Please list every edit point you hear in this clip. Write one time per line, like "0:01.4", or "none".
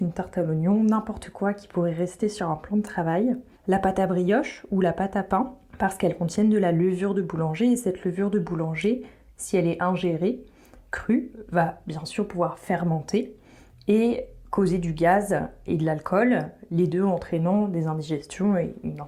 none